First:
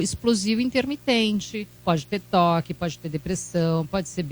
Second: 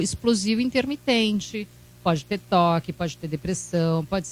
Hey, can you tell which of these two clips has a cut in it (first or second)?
first